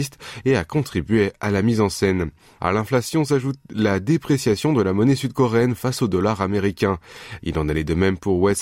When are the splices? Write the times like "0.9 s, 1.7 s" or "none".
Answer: 2.6 s, 7.4 s